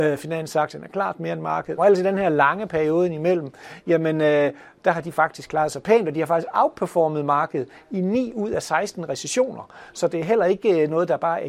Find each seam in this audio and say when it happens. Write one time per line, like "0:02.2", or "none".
0:01.8